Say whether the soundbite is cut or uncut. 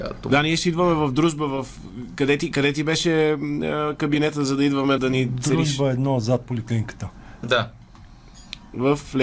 cut